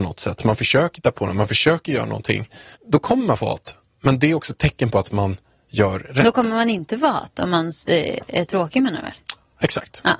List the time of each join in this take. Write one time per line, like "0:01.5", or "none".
0:02.8